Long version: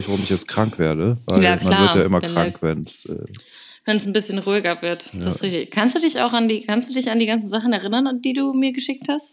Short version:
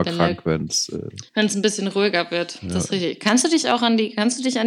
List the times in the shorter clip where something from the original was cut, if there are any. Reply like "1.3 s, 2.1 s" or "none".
1.3 s